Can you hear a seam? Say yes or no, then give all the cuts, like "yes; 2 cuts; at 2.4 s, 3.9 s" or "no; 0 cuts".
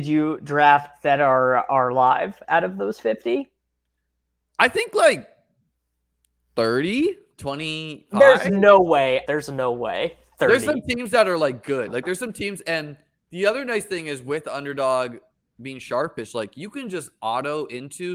yes; 1 cut; at 9.3 s